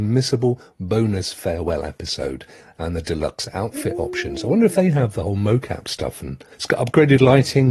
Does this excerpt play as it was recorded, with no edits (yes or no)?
no